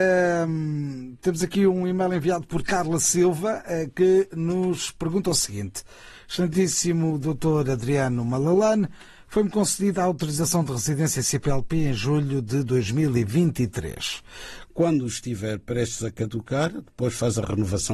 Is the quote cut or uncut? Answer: cut